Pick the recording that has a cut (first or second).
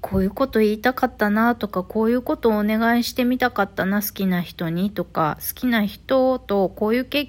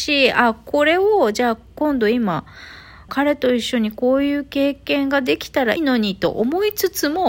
second